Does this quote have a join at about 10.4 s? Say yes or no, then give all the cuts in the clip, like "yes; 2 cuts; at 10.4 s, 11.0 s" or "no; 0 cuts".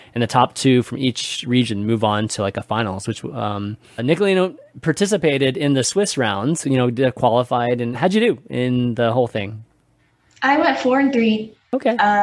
no; 2 cuts; at 4.0 s, 7.9 s